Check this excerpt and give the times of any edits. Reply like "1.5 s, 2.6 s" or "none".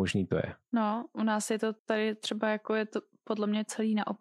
1.8 s